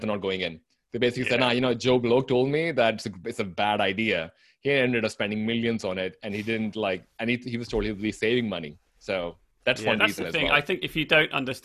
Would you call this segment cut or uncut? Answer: uncut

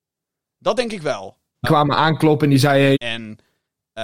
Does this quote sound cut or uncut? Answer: cut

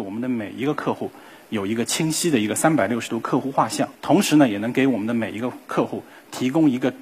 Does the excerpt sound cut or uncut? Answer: cut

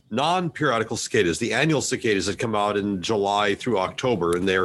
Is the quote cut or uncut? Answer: uncut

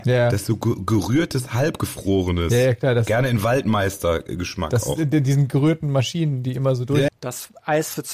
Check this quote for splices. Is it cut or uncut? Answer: cut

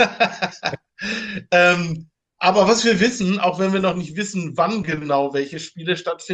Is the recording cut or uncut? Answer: uncut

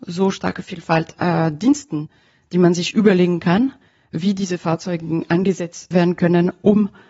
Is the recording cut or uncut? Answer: cut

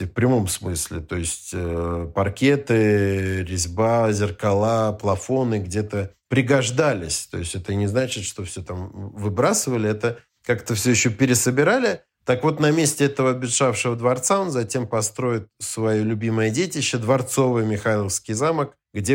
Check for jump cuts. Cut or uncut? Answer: uncut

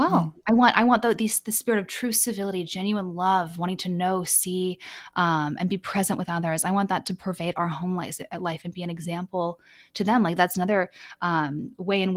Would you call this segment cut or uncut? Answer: uncut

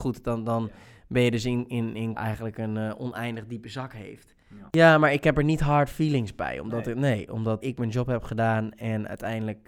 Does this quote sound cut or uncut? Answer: cut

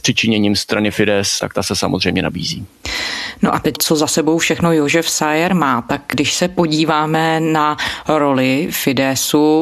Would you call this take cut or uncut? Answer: cut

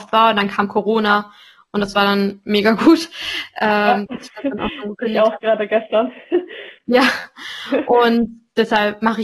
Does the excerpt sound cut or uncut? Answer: uncut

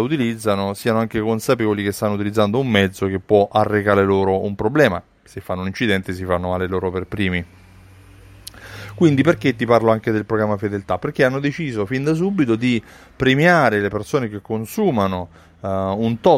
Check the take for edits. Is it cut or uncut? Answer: uncut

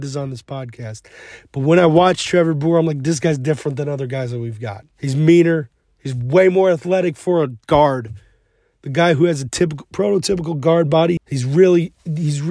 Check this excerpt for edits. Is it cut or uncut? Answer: cut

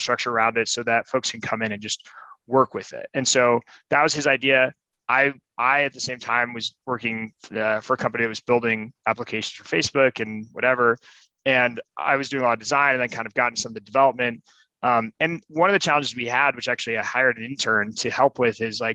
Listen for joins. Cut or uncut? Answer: uncut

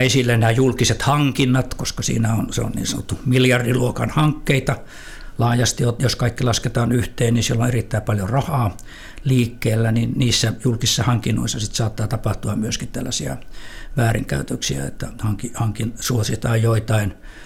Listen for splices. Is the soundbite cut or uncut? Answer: uncut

